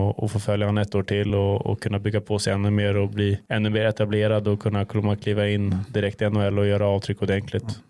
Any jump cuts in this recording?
no; 0 cuts

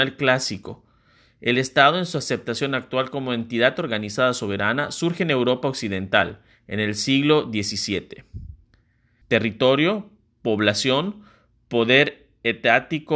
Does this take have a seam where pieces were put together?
yes; 1 cut; at 9.2 s

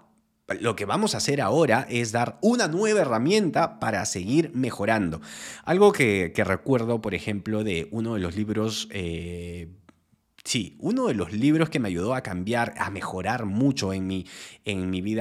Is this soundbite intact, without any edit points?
yes; 0 cuts

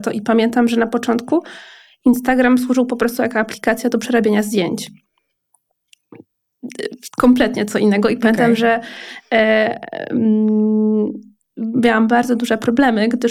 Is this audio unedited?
yes; 0 cuts

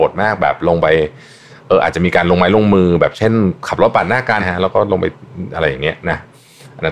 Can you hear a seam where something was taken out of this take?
yes; 1 cut; at 4.4 s

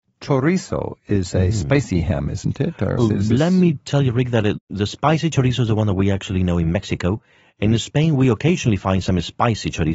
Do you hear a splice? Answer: yes; 1 cut; at 3.0 s

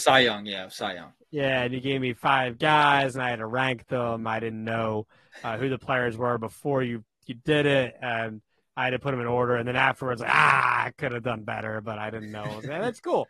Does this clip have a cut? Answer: no; 0 cuts

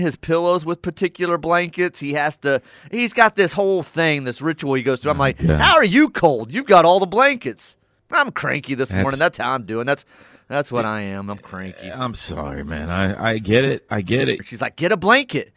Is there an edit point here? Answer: yes; 2 cuts; at 8.0 s, 14.4 s

